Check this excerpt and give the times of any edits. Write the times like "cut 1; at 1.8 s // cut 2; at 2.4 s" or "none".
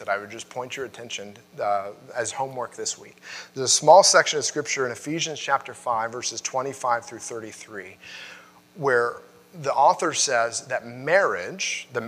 none